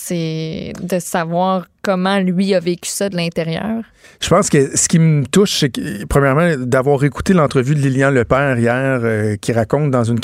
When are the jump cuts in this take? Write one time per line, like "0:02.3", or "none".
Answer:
none